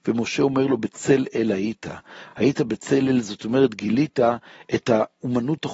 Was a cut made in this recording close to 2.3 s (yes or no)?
no